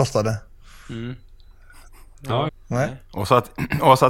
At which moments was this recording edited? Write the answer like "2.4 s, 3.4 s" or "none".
2.5 s